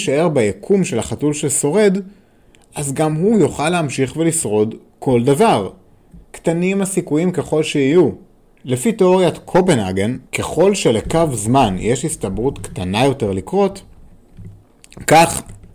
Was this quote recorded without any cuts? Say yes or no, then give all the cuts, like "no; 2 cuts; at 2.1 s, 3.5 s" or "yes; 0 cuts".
no; 2 cuts; at 8.6 s, 10.3 s